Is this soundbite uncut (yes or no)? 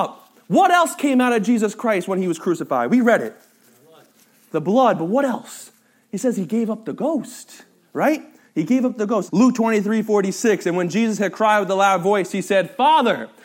no